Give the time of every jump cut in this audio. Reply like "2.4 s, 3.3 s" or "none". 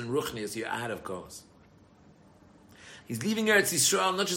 3.0 s